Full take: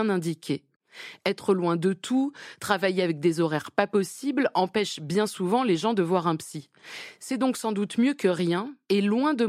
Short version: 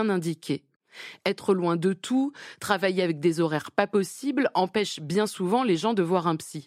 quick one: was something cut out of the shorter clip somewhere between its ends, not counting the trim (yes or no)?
no